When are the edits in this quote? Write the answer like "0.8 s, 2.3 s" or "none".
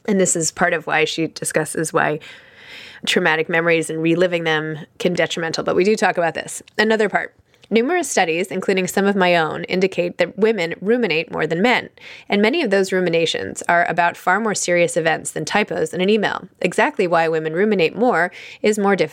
5.2 s